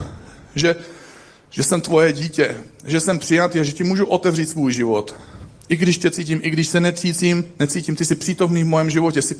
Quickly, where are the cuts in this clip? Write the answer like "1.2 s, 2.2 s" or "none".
none

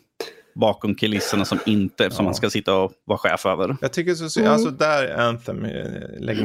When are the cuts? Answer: 2.1 s

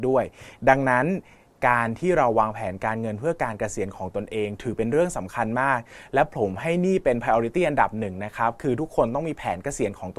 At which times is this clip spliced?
none

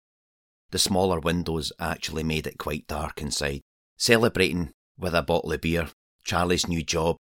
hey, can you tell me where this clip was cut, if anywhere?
3.8 s

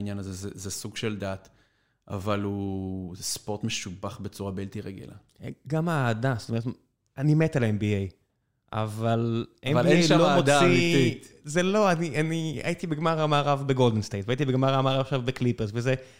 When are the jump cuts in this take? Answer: none

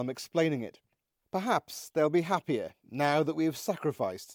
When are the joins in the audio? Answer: 1.2 s

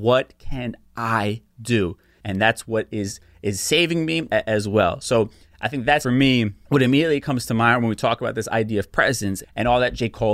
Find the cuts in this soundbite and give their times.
4.3 s, 6.0 s, 9.4 s

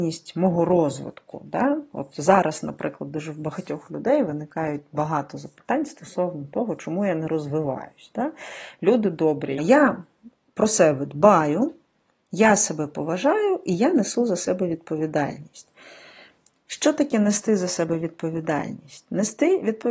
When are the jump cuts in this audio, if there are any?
9.6 s

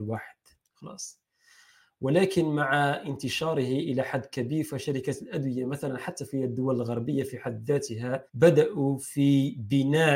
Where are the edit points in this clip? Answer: 8.3 s

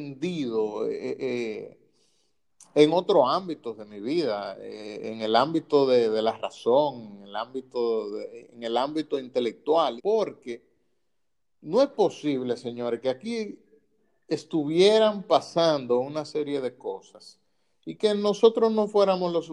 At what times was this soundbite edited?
10.0 s

